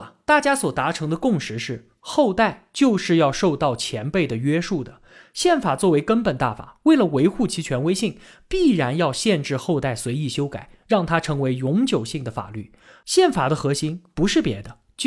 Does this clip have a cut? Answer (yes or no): no